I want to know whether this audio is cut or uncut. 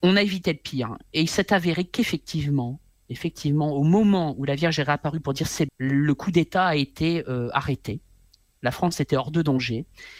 cut